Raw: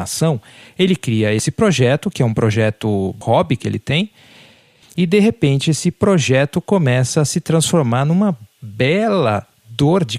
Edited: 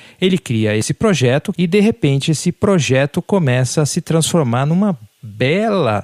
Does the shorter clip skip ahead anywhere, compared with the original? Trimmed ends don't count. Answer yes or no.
yes